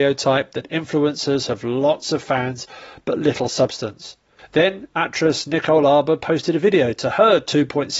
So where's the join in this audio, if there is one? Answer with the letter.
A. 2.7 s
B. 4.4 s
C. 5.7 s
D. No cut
B